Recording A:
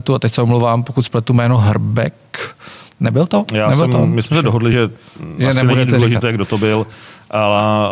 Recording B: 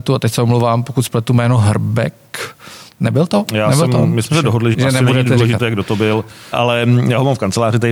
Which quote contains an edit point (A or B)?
B